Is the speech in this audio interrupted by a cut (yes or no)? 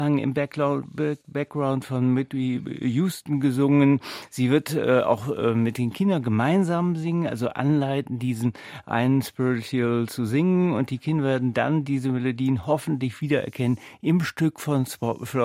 no